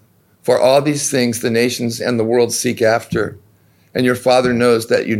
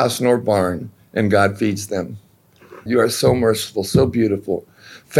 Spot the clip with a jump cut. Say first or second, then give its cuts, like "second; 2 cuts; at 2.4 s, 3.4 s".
second; 1 cut; at 2.9 s